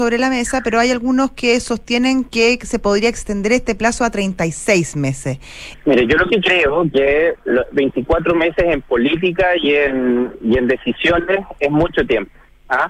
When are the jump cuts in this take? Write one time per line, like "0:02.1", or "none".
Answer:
0:05.7
0:07.4